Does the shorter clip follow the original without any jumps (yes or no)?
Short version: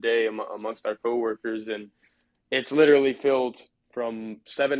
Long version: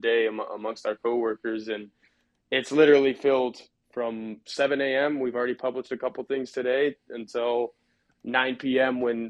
yes